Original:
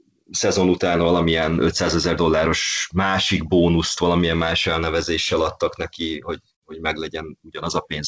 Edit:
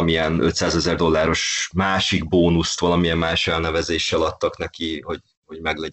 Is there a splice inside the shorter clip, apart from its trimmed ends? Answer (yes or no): no